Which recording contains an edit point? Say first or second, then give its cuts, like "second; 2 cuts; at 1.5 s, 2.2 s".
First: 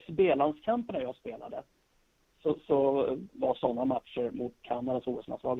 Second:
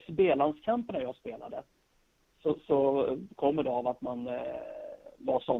first; 2 cuts; at 3.3 s, 4.6 s